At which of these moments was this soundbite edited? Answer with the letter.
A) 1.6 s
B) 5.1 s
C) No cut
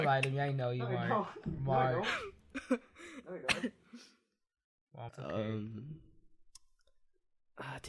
B